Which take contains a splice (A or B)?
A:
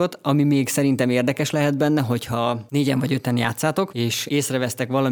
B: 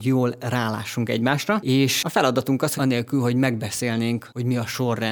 B